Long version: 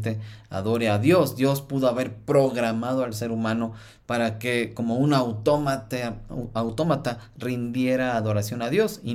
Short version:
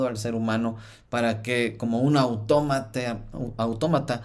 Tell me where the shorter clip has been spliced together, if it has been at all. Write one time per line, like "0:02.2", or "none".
none